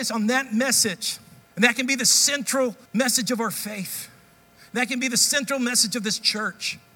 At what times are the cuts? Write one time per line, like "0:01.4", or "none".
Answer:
0:01.4
0:02.9